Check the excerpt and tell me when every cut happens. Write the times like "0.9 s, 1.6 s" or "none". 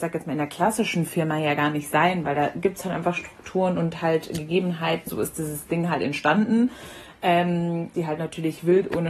5.1 s, 7.9 s